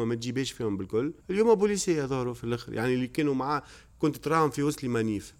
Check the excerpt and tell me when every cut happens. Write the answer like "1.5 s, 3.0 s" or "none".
1.2 s